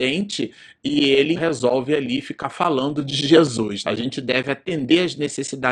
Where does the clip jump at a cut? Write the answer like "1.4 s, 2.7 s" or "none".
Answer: 1.4 s, 3.8 s